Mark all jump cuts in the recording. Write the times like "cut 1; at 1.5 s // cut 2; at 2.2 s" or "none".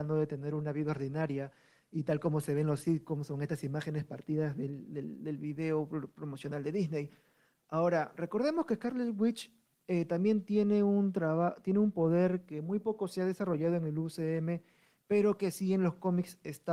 none